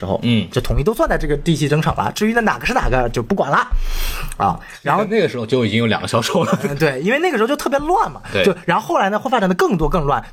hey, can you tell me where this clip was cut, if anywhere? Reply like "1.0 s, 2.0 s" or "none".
none